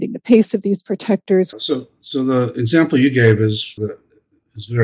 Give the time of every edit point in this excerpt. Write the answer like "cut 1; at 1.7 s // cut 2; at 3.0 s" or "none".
cut 1; at 1.5 s // cut 2; at 3.8 s